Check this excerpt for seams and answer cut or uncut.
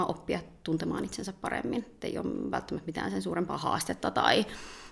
uncut